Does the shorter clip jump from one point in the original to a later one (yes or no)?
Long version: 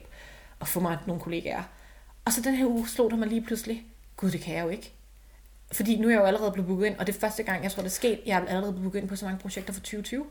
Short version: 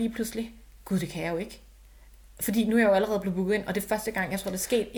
no